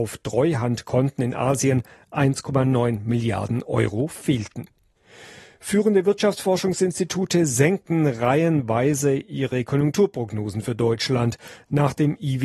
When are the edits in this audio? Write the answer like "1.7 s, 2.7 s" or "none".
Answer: none